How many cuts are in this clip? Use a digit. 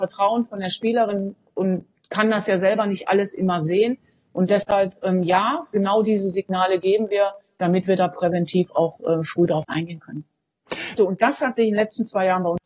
1